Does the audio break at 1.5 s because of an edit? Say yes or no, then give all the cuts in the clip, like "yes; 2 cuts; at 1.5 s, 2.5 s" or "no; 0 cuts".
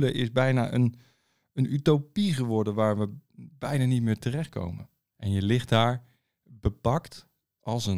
no; 1 cut; at 5.1 s